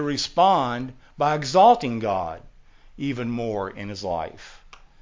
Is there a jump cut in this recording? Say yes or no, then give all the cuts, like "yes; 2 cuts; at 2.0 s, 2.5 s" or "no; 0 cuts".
no; 0 cuts